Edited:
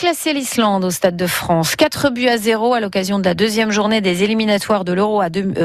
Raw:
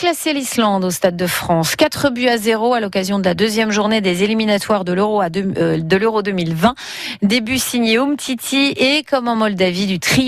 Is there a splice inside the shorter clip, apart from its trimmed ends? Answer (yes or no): no